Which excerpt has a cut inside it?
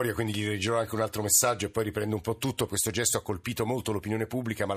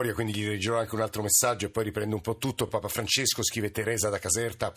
first; 1 cut; at 2.7 s

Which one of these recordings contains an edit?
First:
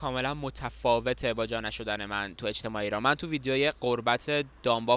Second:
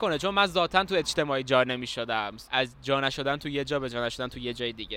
second; 1 cut; at 2.4 s

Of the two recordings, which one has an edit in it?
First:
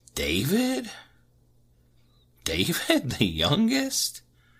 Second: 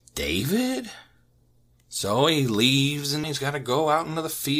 second; 1 cut; at 1.7 s

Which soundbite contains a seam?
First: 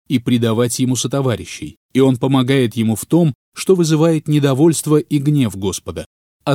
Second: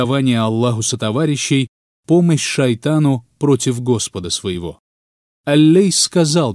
first; 1 cut; at 1.8 s

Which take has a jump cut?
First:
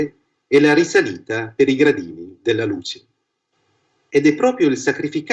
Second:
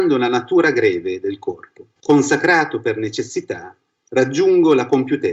second; 1 cut; at 2.0 s

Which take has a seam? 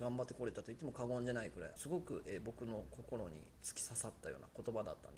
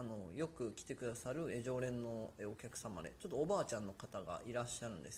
first; 2 cuts; at 1.8 s, 3.6 s

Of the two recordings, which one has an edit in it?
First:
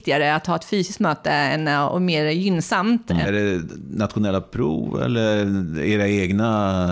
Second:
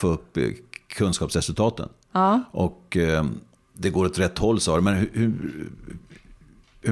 first; 1 cut; at 3.2 s

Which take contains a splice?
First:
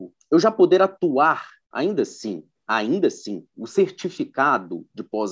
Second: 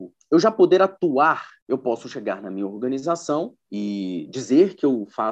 first; 2 cuts; at 1.6 s, 3.5 s

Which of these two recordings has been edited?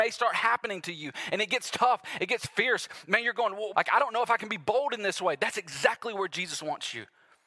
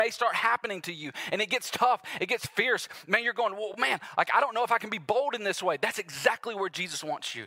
first; 1 cut; at 3.7 s

